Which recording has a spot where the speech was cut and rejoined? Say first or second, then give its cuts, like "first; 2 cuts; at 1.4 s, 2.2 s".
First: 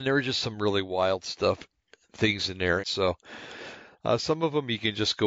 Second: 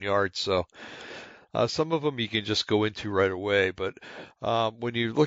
first; 1 cut; at 2.8 s